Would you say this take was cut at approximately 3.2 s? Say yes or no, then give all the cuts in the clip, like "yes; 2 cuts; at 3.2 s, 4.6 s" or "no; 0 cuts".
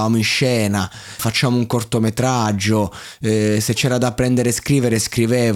no; 1 cut; at 1.2 s